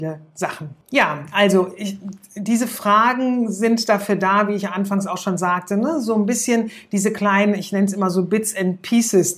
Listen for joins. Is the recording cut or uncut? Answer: uncut